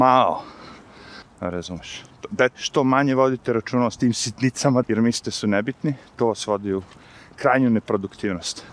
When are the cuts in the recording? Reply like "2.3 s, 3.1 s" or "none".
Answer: 1.2 s, 2.5 s, 4.8 s